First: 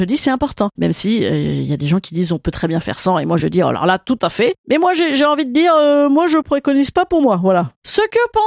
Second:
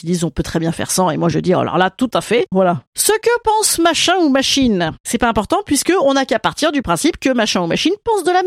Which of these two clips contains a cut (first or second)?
second